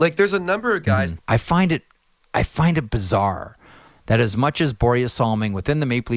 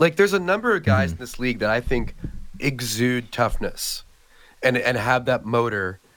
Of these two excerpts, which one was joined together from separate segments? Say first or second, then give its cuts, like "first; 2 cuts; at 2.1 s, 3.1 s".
first; 1 cut; at 1.2 s